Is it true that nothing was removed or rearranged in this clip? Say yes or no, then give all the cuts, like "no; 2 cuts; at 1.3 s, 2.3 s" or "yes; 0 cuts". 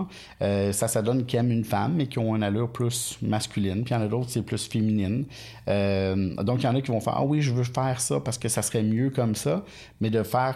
yes; 0 cuts